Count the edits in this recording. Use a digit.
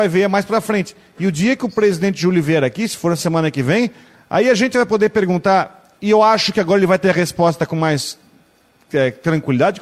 1